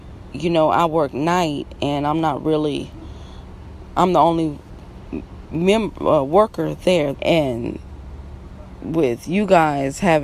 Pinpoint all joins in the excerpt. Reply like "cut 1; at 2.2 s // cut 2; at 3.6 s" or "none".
cut 1; at 7.1 s